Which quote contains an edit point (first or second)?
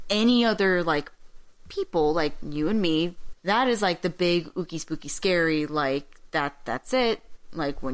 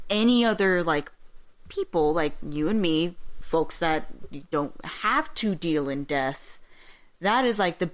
first